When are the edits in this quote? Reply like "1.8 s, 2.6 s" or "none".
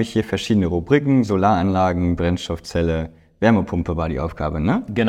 none